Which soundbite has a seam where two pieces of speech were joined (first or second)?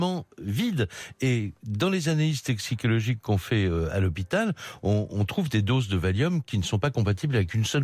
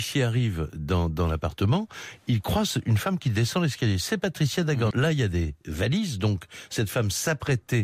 second